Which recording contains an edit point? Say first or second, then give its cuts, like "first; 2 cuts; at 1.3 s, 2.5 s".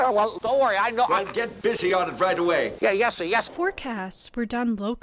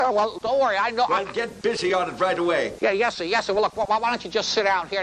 first; 1 cut; at 3.5 s